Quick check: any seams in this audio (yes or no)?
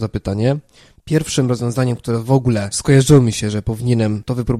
yes